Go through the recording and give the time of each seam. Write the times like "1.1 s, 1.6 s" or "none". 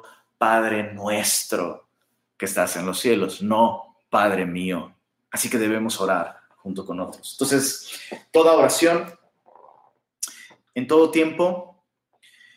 10.7 s

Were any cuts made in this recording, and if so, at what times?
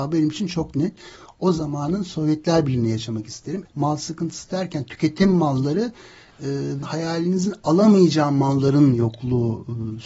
3.7 s, 6.8 s

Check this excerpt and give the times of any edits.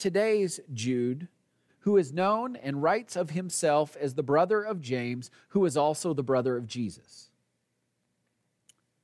1.7 s

